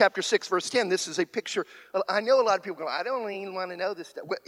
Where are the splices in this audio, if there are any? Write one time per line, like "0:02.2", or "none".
none

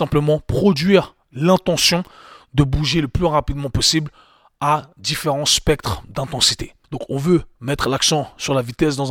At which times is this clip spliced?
0:06.8

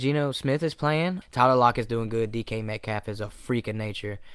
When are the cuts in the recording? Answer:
0:01.2

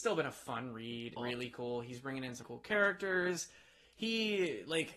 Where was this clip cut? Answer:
0:01.2
0:02.4

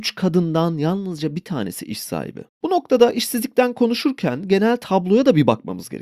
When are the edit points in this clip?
0:02.5

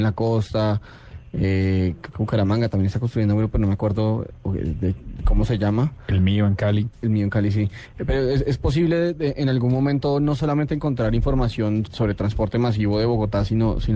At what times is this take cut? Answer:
0:11.9

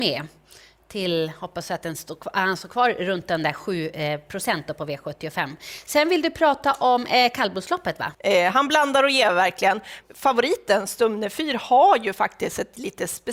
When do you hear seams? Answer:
0:08.1
0:10.0

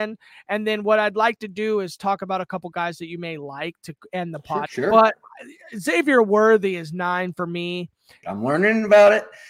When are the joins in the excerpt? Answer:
0:04.7
0:08.2

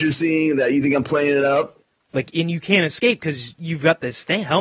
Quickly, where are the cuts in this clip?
0:02.1

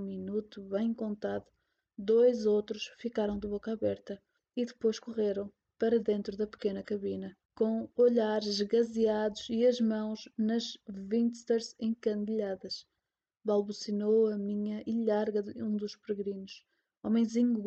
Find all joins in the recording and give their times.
0:07.4
0:13.3

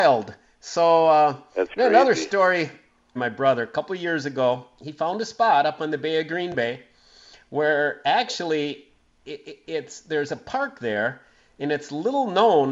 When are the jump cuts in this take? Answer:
0:03.2

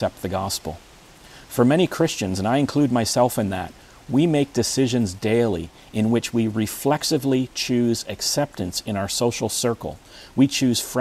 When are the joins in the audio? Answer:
none

